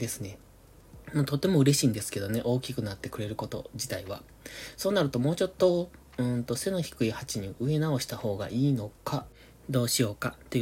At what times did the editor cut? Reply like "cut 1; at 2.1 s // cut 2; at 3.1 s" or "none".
none